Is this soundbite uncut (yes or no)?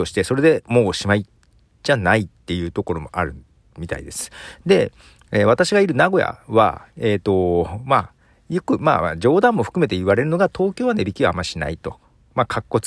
yes